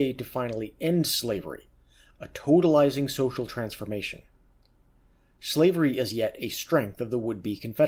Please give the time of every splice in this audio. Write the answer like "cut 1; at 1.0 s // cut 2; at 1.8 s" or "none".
none